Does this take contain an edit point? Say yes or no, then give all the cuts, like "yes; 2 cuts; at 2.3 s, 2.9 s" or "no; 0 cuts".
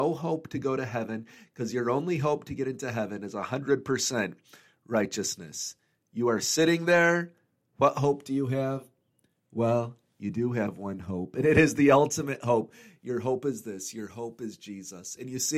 no; 0 cuts